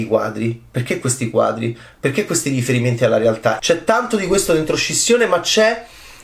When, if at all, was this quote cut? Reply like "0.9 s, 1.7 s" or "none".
3.6 s